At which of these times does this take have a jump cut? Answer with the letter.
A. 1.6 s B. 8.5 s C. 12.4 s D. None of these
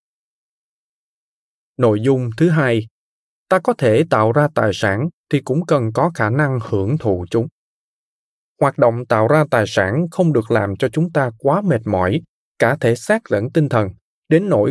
B